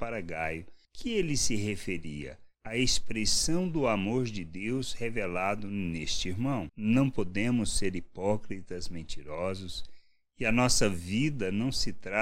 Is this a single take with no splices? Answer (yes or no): no